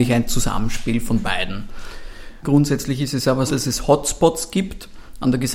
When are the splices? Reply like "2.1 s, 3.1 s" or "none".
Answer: 2.4 s, 3.5 s